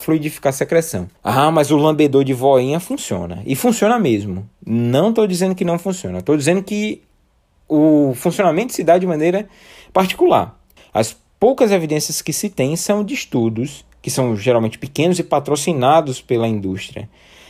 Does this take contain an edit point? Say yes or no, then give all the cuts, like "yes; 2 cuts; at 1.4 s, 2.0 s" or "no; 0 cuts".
yes; 2 cuts; at 1.2 s, 10.8 s